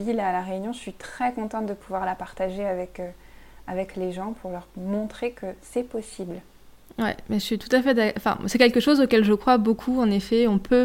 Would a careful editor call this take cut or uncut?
uncut